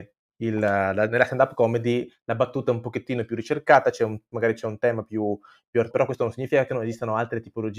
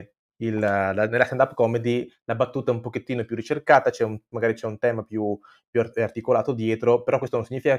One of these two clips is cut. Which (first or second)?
first